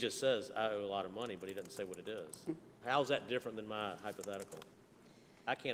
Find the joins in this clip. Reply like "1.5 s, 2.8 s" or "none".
2.8 s